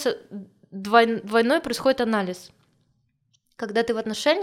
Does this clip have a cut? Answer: no; 0 cuts

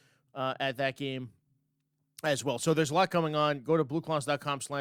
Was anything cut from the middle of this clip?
no; 0 cuts

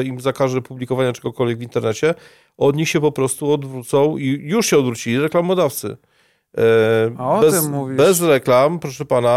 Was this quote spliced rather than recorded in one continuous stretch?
no; 0 cuts

